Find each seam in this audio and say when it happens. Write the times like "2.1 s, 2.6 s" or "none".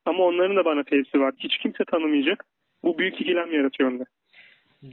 1.4 s

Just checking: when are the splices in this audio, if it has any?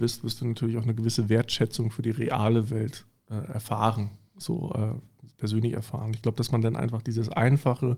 none

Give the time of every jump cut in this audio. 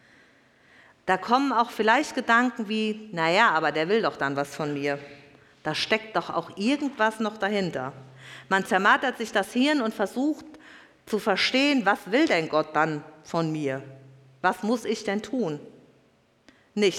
none

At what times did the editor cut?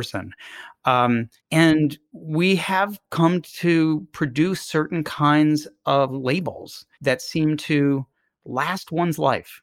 1.4 s, 6.9 s

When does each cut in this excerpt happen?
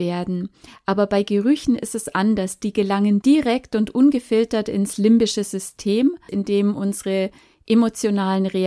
6.3 s

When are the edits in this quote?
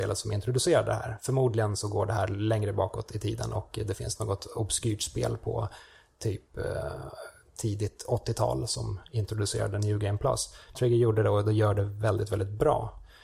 10.7 s

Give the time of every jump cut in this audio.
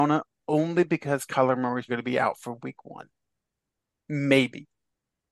1.9 s

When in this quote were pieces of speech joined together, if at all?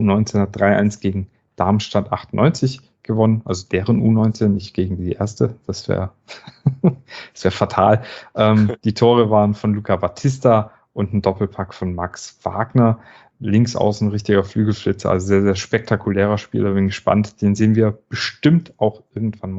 13.3 s

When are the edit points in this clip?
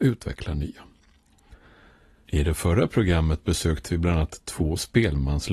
none

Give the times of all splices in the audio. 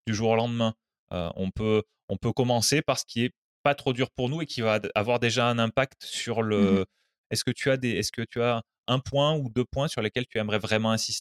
7.2 s

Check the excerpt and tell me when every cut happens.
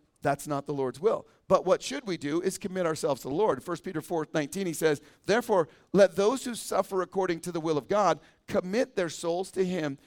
none

